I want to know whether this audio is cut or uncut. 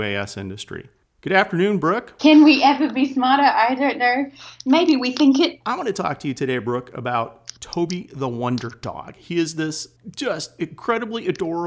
cut